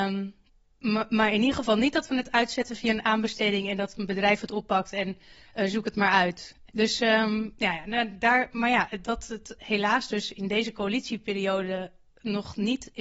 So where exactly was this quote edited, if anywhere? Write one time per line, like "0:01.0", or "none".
0:06.7
0:09.6